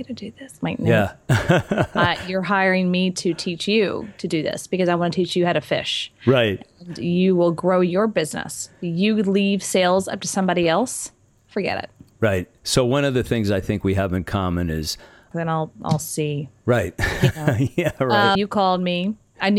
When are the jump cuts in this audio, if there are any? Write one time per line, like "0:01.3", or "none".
0:15.3
0:18.4